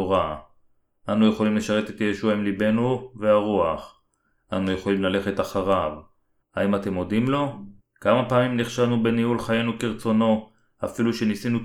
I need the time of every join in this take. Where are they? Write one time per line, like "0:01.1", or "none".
0:06.4
0:07.8